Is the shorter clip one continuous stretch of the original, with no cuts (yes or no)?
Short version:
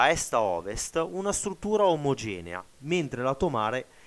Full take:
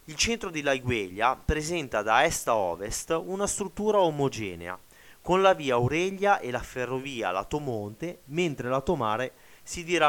no